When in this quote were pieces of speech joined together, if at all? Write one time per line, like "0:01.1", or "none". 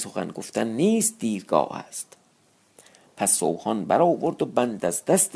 none